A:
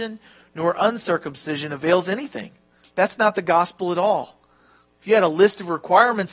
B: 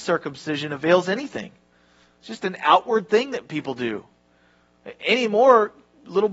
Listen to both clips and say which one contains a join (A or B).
A